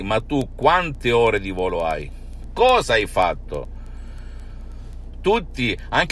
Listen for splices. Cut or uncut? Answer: cut